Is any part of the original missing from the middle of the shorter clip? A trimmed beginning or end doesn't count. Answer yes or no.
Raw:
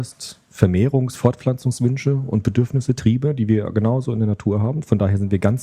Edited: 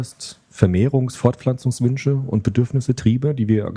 no